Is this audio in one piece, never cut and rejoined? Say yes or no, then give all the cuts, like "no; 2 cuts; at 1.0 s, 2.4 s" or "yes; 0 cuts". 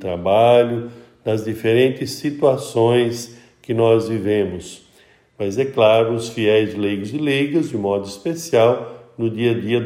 no; 1 cut; at 5.3 s